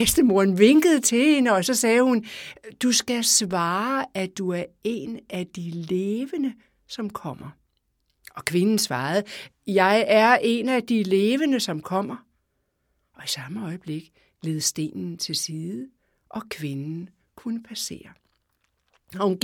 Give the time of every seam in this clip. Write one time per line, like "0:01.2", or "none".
none